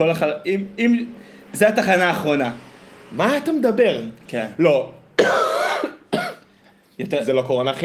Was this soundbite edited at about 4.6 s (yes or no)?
no